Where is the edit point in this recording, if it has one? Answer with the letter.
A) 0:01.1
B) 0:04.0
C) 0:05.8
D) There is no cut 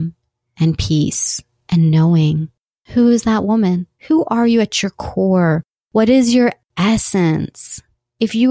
B